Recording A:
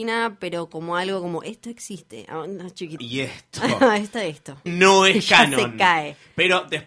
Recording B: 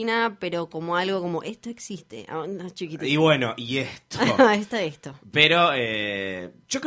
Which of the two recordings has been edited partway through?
A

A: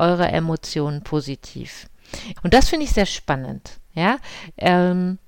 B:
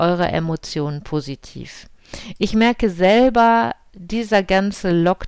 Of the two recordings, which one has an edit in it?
A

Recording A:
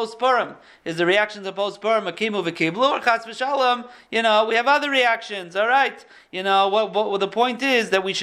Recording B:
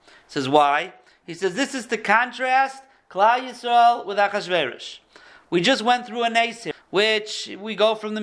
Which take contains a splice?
B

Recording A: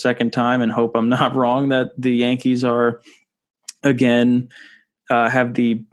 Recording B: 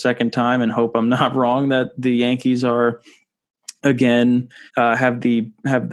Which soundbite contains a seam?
B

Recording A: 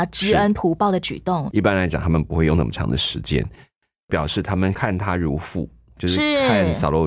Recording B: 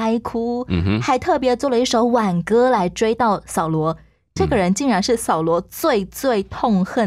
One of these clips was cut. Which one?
A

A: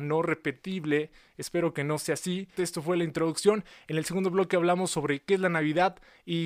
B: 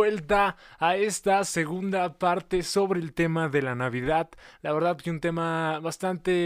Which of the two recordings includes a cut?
A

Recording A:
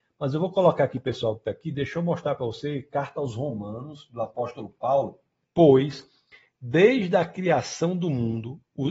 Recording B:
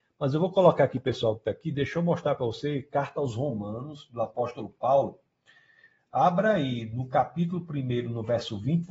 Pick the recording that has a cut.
A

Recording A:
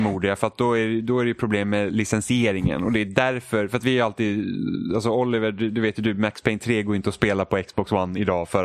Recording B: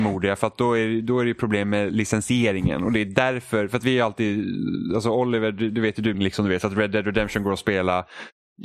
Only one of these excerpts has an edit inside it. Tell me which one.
B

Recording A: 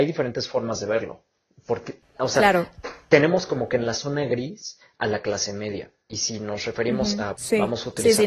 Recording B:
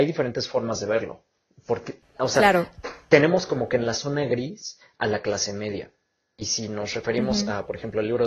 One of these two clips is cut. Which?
A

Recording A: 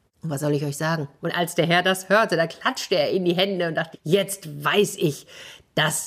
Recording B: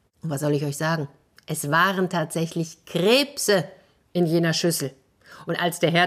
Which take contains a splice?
A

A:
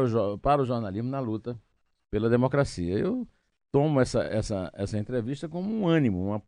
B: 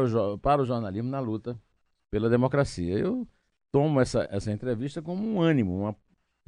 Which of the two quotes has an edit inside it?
B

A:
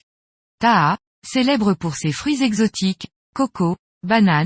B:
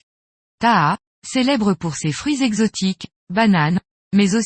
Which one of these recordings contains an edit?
B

